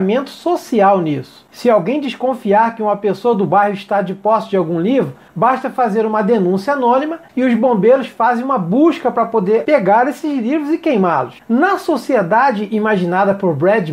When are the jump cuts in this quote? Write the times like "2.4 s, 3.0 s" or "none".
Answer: 11.4 s